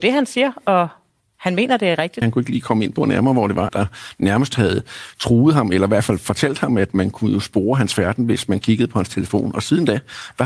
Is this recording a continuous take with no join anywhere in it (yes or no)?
no